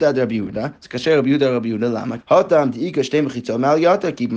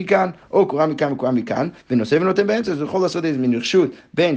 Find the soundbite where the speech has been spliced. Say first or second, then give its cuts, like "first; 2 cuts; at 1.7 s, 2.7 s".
first; 1 cut; at 2.2 s